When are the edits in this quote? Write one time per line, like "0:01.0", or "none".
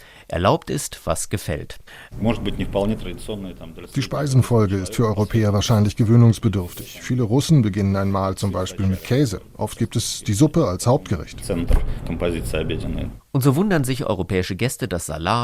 0:02.1